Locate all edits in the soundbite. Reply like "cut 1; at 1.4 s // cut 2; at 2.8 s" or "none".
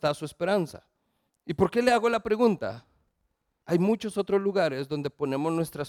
cut 1; at 1.3 s // cut 2; at 3.6 s